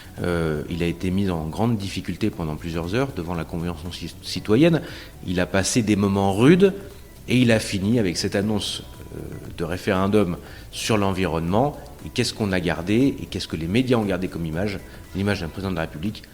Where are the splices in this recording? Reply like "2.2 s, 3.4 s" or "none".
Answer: none